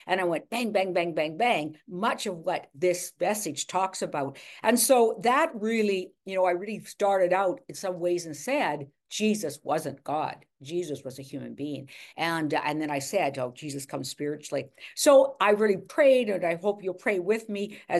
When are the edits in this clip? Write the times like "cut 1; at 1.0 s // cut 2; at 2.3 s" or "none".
none